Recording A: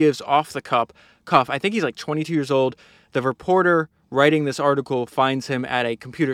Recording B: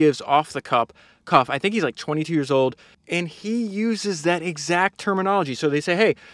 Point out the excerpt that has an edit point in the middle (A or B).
B